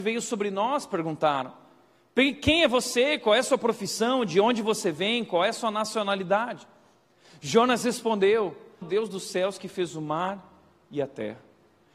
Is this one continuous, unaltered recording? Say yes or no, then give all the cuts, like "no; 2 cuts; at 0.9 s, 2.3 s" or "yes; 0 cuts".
no; 1 cut; at 8.8 s